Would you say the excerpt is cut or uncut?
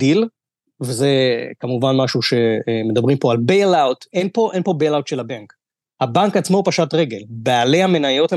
uncut